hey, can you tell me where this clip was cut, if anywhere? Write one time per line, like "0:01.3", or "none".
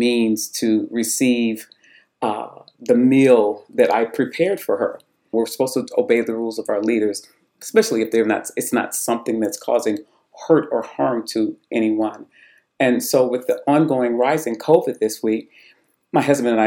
0:05.3